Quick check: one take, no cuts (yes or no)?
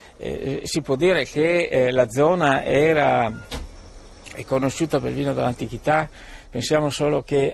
yes